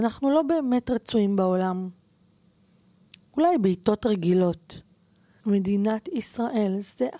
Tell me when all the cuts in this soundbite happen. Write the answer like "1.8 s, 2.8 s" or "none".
5.4 s